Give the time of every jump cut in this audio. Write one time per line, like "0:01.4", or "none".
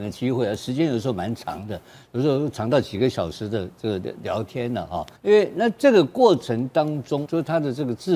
0:05.2
0:07.3